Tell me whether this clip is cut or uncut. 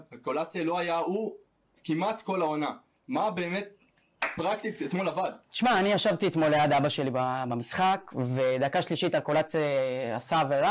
uncut